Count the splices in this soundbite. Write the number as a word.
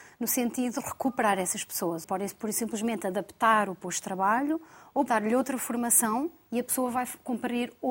two